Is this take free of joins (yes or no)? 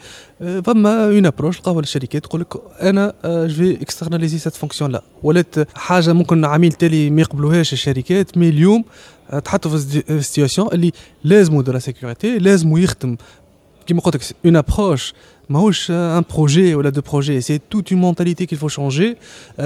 no